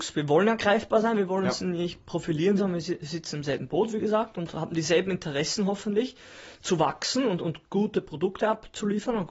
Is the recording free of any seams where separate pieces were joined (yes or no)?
no